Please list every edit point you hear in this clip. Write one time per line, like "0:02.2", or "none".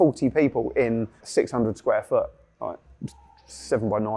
0:01.2